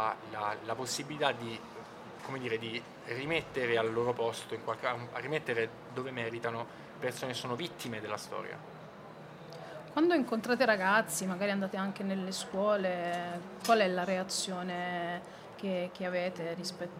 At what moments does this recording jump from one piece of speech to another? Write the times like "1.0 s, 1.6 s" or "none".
none